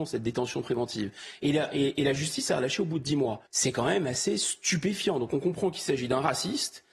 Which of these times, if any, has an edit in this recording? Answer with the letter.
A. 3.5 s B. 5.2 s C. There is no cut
A